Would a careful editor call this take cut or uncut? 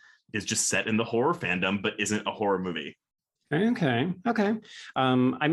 uncut